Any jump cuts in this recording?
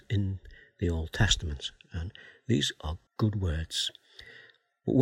yes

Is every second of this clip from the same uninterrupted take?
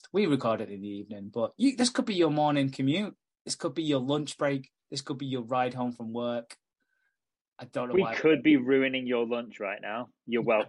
yes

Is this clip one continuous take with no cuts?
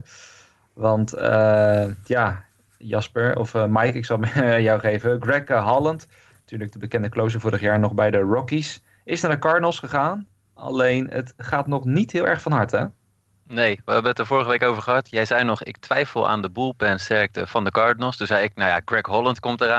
yes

